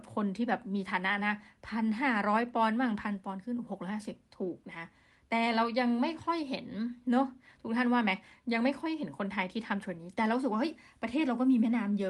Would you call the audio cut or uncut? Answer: cut